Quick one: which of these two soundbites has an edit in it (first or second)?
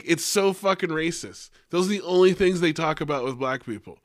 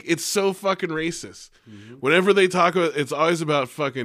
second